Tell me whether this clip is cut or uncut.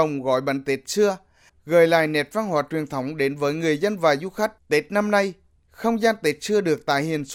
cut